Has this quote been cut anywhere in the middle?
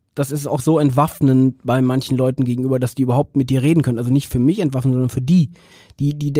no; 0 cuts

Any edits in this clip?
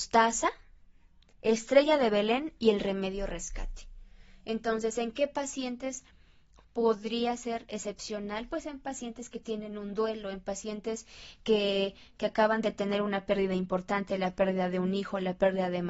no; 0 cuts

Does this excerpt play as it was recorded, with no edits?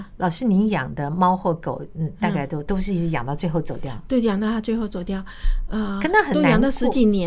yes; 0 cuts

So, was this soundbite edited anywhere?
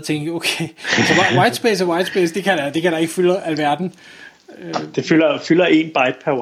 yes; 1 cut; at 2.3 s

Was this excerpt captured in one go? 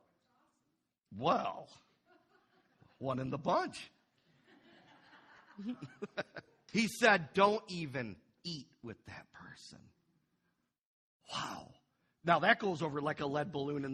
no; 1 cut; at 6.7 s

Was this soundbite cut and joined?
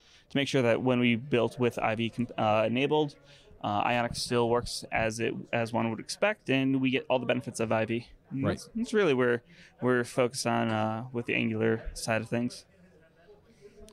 no; 0 cuts

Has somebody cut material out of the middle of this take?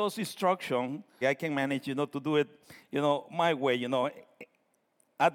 yes; 1 cut; at 1.2 s

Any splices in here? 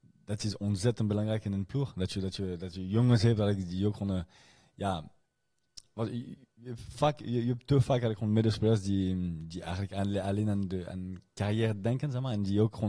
no; 0 cuts

